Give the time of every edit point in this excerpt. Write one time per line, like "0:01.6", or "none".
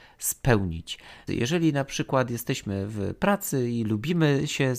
0:01.3